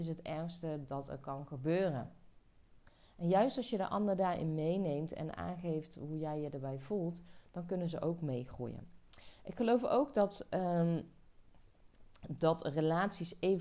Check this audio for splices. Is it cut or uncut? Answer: uncut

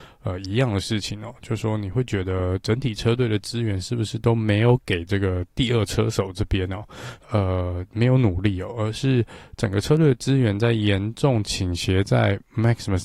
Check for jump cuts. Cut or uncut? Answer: cut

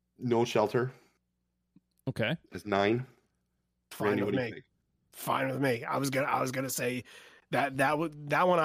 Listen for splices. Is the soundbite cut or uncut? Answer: uncut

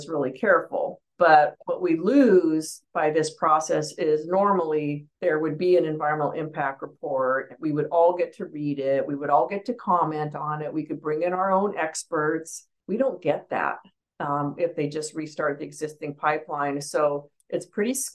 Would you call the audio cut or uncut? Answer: uncut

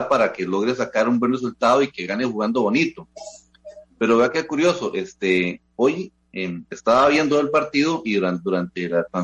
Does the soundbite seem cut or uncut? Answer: uncut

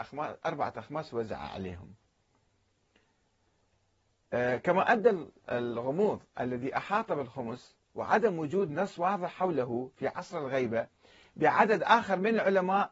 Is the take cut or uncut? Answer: uncut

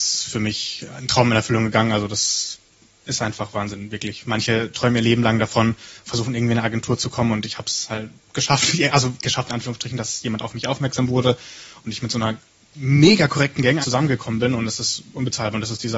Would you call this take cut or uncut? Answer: cut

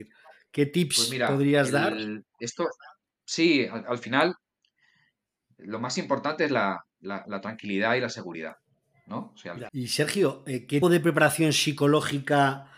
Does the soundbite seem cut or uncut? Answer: cut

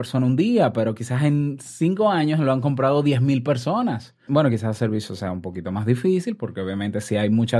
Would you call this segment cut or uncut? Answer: cut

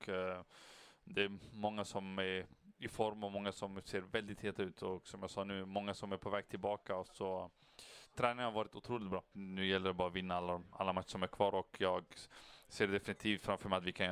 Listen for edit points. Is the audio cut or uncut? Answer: cut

